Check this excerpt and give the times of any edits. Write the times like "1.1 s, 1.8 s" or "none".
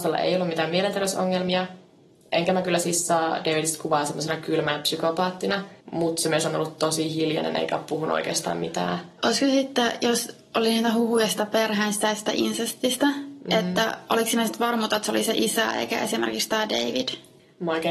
5.8 s